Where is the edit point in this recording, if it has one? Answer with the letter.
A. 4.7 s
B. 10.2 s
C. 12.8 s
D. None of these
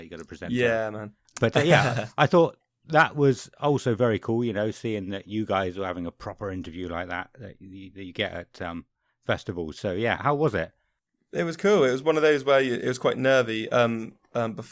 B